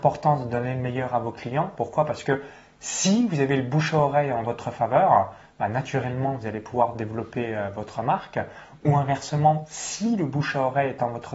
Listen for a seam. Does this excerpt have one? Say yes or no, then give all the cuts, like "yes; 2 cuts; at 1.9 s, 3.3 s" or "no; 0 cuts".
no; 0 cuts